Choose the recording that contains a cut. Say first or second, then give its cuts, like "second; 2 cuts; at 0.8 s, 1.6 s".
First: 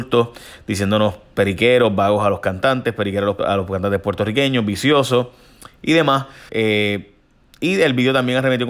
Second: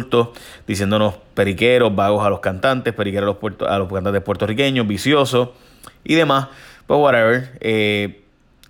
first; 2 cuts; at 3.4 s, 6.5 s